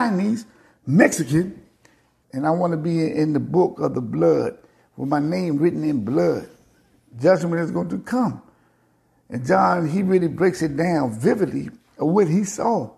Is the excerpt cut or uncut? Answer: cut